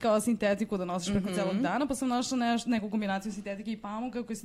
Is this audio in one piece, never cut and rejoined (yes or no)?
yes